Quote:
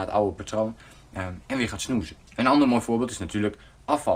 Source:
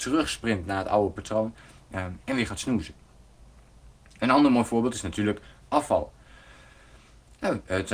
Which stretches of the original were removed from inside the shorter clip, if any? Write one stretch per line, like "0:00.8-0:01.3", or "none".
0:03.0-0:04.1